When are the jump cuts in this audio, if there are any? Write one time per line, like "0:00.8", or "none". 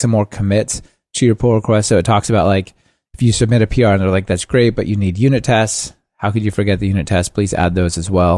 none